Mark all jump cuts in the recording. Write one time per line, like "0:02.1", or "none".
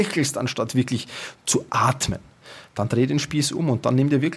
none